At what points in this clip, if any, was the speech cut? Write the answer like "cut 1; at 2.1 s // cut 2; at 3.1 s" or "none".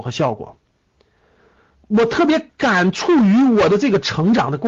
cut 1; at 1.7 s